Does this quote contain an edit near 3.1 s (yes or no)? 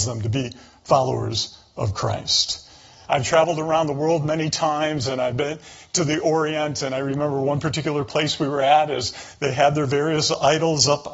yes